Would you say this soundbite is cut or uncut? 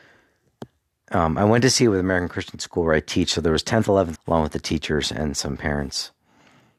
cut